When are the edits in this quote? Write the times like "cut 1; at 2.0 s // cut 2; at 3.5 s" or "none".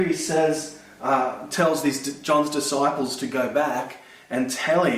none